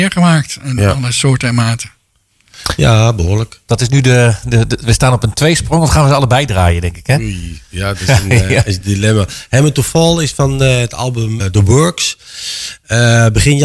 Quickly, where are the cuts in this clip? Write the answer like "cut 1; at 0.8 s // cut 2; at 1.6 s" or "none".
cut 1; at 3.7 s // cut 2; at 11.4 s